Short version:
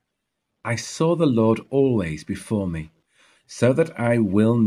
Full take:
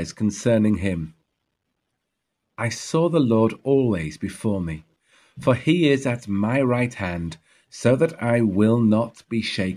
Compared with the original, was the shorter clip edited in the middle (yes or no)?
yes